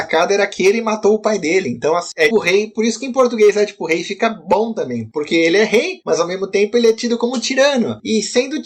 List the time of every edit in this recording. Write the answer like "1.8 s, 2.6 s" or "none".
2.3 s